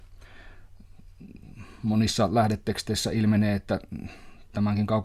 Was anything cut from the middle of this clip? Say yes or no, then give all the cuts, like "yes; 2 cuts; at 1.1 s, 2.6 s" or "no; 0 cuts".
no; 0 cuts